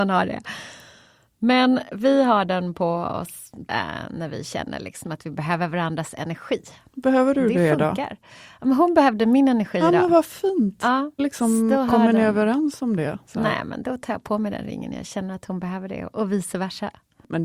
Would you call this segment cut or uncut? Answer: cut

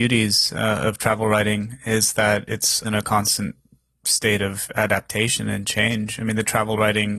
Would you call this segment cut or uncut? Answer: cut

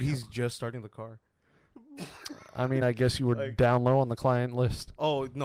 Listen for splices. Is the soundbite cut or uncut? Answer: uncut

